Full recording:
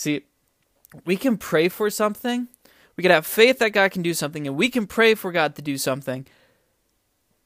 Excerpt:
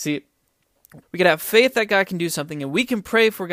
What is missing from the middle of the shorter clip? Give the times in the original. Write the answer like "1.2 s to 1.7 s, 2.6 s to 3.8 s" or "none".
1.0 s to 2.9 s